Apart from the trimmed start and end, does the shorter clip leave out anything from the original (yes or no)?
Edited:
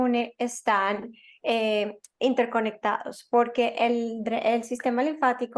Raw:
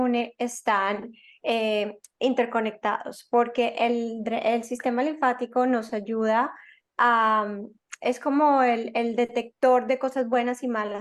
no